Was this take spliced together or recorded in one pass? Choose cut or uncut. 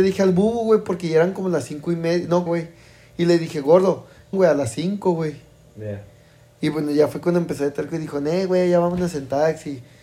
cut